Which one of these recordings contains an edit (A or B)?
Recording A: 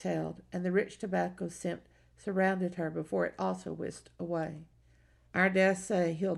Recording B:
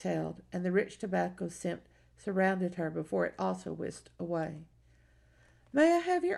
A